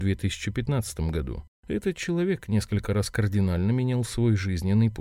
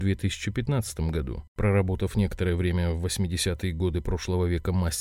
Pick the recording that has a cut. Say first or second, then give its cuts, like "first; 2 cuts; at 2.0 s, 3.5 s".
second; 1 cut; at 1.5 s